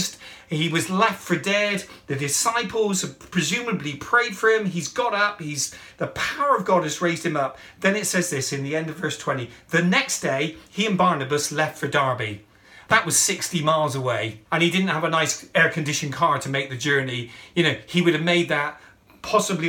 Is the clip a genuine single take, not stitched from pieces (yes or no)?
no